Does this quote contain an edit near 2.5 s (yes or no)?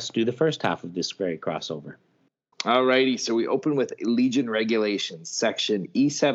yes